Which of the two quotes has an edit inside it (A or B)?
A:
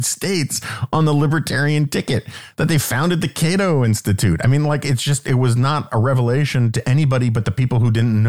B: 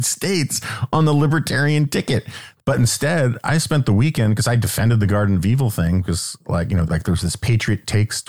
B